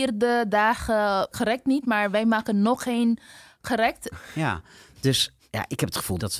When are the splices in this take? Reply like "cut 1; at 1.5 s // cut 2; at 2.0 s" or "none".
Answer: cut 1; at 4.1 s